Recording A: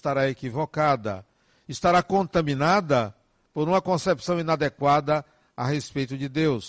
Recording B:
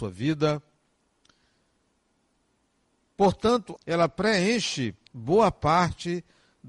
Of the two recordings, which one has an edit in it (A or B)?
B